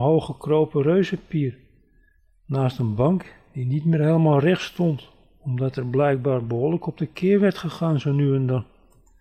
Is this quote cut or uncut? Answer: uncut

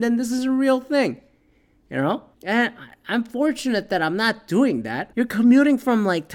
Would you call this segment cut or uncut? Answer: cut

